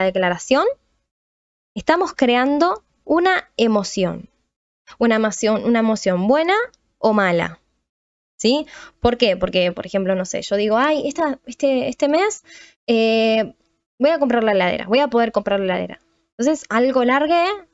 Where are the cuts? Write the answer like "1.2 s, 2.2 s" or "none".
none

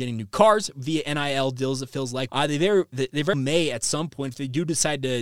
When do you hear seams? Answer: 2.3 s, 3.3 s

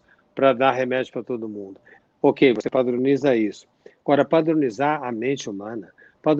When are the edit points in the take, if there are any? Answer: 2.0 s

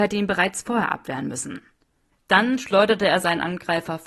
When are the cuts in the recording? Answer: 2.1 s

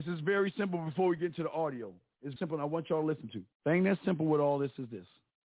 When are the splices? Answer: 2.4 s, 3.5 s

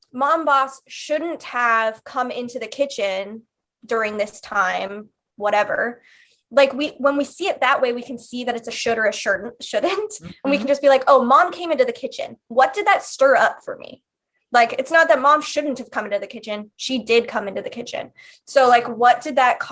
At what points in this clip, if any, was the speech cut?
none

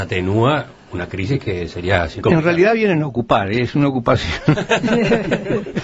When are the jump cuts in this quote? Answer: 2.2 s

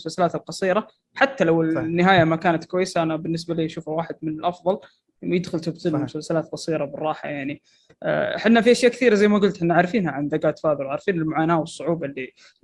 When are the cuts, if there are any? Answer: none

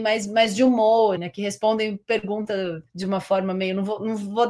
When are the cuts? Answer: 1.2 s, 2.9 s

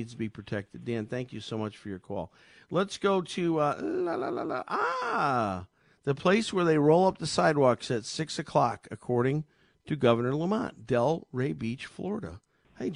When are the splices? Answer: none

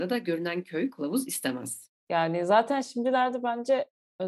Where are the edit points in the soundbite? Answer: 2.0 s

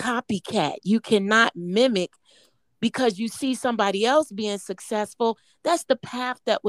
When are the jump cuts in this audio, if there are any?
none

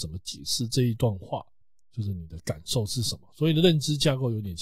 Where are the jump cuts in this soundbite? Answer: none

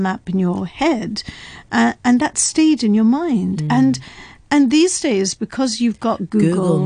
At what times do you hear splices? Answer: none

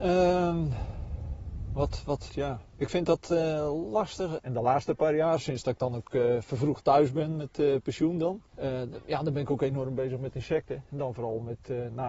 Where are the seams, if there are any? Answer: 2.3 s, 4.4 s

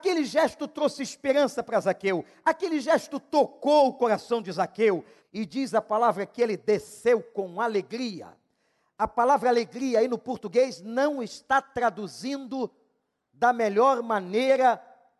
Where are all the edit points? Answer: 5.2 s

